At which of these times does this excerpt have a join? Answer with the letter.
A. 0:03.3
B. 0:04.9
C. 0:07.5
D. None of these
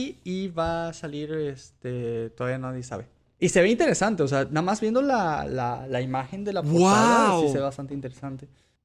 A